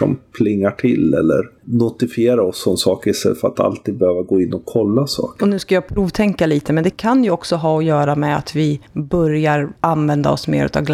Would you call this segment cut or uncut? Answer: cut